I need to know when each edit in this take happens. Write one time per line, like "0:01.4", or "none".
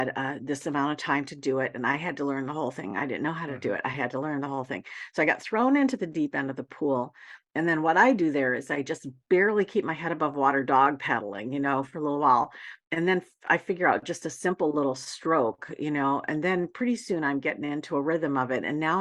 none